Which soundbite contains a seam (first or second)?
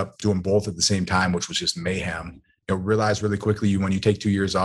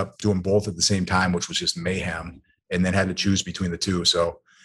first